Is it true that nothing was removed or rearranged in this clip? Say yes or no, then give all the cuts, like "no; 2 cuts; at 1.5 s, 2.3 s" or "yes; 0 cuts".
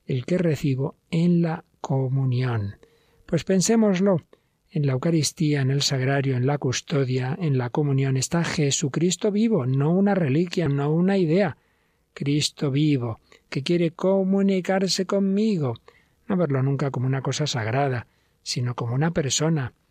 no; 1 cut; at 10.7 s